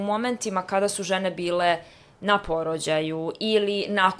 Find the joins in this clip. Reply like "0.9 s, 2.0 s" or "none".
none